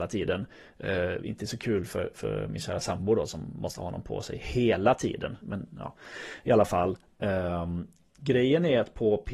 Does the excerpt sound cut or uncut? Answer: cut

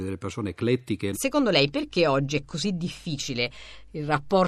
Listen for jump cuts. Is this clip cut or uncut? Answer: cut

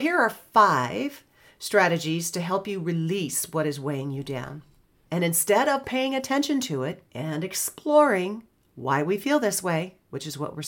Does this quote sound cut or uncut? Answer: cut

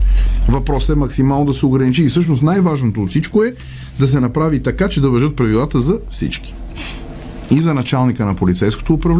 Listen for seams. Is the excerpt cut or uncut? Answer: uncut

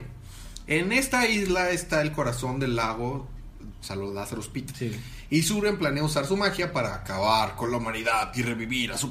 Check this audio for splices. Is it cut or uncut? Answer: cut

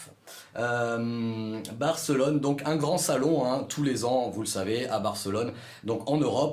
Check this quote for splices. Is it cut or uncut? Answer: uncut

